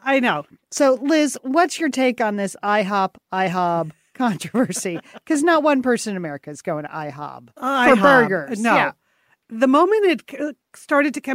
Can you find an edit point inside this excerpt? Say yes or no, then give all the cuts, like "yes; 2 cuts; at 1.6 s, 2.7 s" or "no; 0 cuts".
no; 0 cuts